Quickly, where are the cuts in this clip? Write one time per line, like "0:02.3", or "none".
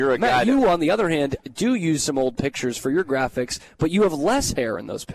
none